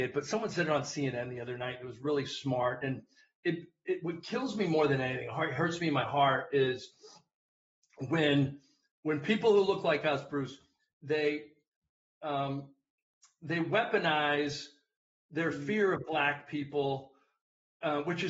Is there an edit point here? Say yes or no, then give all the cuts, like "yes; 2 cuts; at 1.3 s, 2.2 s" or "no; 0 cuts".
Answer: no; 0 cuts